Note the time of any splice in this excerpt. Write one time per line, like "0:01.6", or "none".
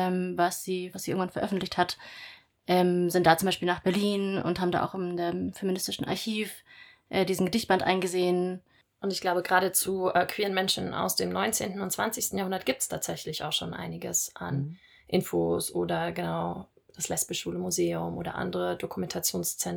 0:00.9